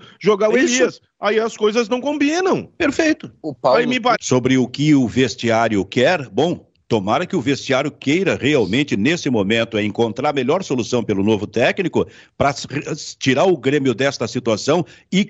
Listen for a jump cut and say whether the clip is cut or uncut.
cut